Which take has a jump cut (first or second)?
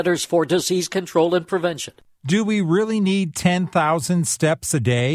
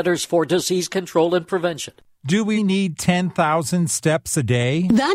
second